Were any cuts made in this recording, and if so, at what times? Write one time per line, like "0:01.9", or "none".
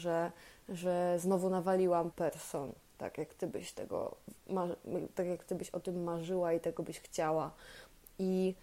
0:02.1

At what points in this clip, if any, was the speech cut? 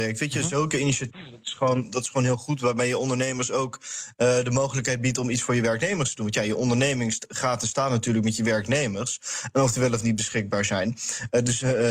none

